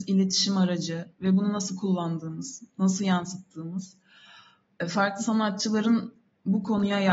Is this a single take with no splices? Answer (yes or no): yes